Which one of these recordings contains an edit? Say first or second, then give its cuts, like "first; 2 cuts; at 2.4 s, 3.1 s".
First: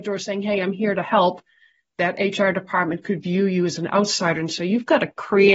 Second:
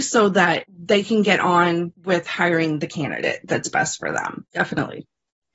second; 1 cut; at 4.5 s